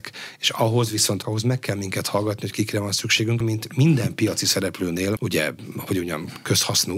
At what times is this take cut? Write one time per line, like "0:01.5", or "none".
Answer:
0:01.2
0:03.4
0:05.2